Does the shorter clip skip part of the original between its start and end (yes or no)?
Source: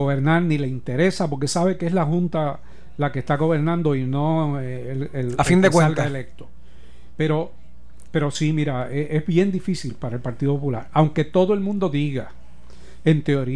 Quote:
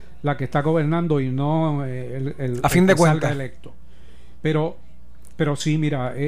no